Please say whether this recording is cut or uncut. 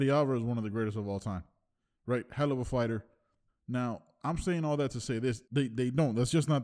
cut